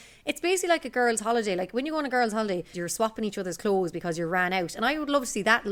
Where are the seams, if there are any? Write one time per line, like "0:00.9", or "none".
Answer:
0:02.7